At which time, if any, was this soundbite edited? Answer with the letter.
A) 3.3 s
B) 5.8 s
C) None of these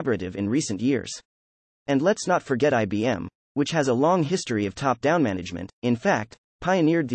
B